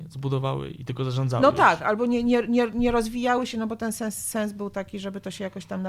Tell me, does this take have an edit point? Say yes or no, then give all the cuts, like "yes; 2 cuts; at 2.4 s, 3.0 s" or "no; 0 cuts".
no; 0 cuts